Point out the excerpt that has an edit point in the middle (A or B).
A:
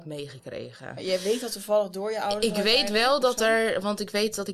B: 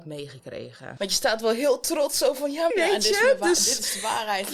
B